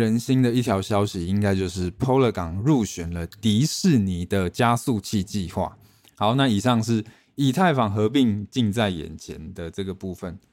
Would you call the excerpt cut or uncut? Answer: cut